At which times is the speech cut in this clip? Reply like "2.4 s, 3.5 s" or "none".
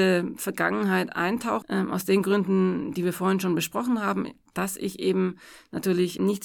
1.6 s